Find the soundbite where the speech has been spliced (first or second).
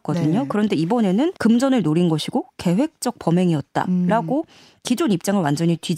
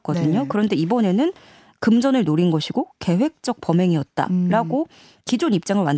first